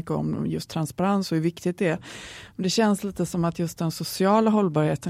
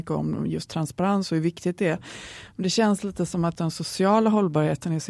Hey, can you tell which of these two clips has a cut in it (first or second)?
second